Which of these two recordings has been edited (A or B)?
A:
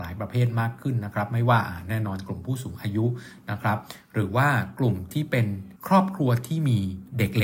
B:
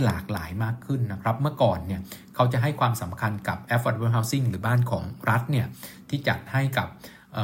A